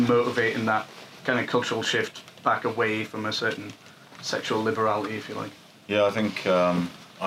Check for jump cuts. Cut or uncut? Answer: uncut